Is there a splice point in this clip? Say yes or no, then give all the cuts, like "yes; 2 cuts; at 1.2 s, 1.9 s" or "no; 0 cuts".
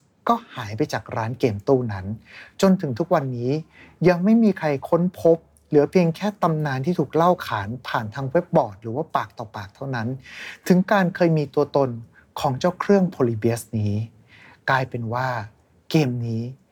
no; 0 cuts